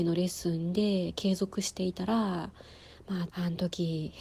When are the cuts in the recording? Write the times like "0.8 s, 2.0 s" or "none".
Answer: 3.3 s

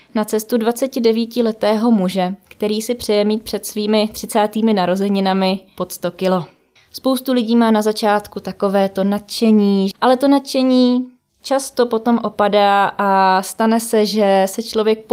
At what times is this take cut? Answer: 6.8 s, 9.9 s

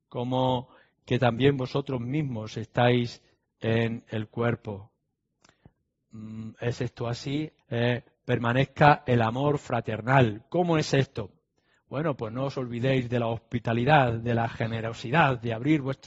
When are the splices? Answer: 7.6 s

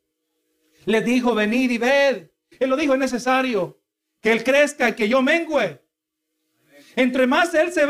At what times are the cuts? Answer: 2.5 s

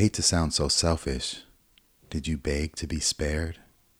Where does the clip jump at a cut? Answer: 2.0 s

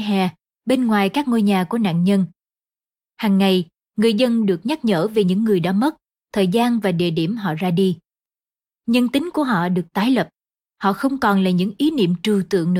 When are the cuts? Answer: none

